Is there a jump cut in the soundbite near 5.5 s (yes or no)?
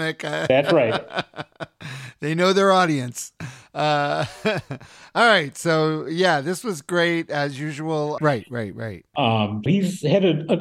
no